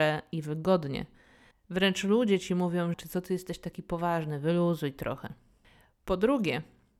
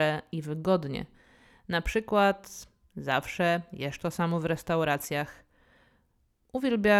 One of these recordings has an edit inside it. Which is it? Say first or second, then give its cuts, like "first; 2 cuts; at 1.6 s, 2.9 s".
first; 2 cuts; at 1.5 s, 2.9 s